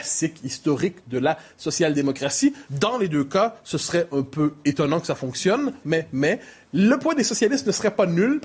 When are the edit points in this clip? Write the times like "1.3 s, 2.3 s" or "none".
2.7 s, 5.8 s